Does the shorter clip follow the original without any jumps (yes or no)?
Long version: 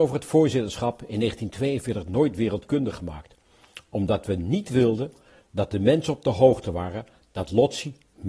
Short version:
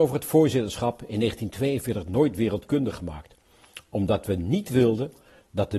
yes